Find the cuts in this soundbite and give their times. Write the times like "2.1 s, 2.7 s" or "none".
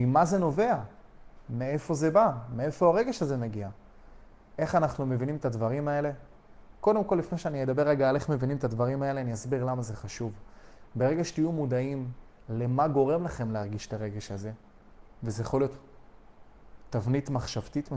15.1 s